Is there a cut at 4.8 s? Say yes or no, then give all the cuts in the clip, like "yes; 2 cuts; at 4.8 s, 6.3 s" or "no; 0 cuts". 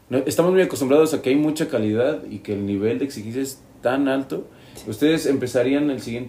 yes; 1 cut; at 4.8 s